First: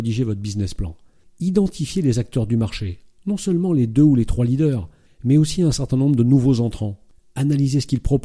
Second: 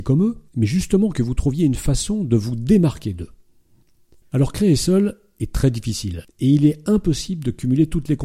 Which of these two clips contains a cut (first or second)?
second